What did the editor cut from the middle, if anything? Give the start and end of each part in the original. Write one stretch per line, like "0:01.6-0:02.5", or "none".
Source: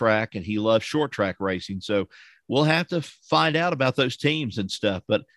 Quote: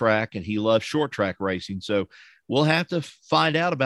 none